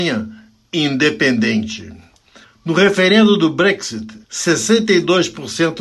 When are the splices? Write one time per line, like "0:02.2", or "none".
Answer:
0:02.4
0:04.2